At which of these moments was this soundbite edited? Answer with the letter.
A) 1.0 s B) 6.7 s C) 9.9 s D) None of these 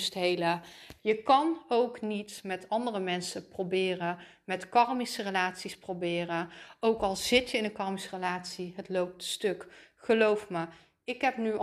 A